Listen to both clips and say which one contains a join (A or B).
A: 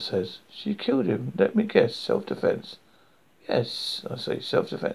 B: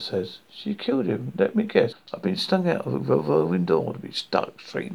B